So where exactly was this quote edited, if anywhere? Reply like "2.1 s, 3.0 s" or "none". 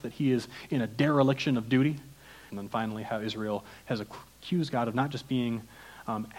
2.5 s